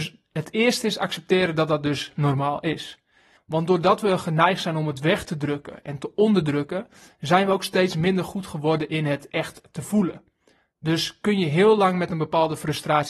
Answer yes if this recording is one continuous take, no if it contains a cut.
no